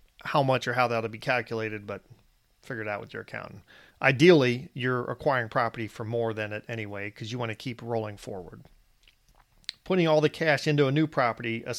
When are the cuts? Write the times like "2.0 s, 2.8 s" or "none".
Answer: none